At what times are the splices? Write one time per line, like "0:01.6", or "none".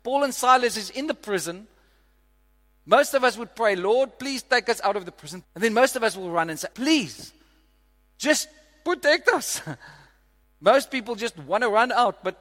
0:05.4
0:06.7
0:10.4